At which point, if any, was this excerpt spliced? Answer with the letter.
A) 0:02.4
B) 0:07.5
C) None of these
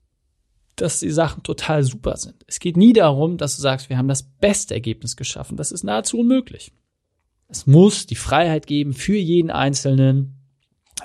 B